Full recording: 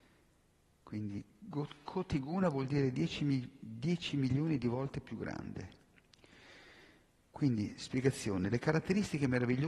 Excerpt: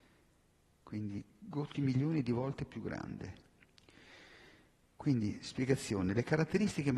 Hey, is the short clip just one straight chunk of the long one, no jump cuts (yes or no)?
no